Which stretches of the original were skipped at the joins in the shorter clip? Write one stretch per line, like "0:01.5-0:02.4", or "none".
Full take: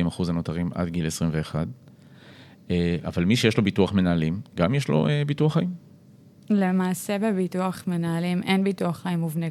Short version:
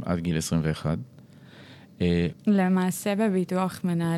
0:03.0-0:06.4

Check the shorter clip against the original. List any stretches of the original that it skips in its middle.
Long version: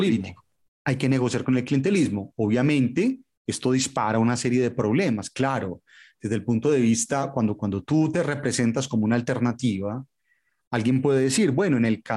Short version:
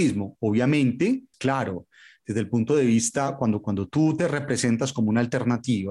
0:03.3-0:05.3

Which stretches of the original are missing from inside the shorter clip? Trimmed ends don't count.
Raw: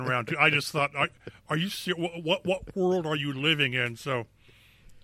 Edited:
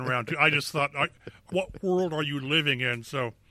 0:01.5-0:02.4

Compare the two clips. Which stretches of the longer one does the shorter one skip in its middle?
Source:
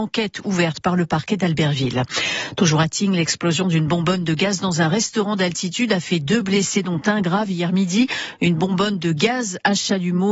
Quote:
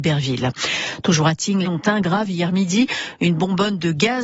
0:03.2-0:06.8

